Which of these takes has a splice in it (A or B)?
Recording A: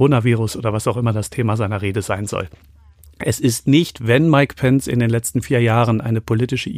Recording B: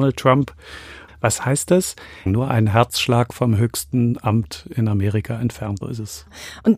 B